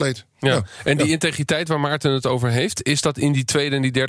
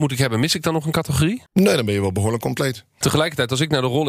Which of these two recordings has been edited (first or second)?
second